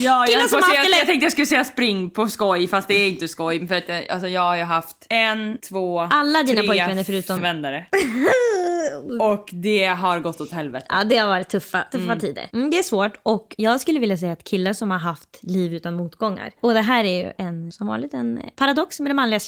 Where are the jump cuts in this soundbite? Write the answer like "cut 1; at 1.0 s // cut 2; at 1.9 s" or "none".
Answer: cut 1; at 7.4 s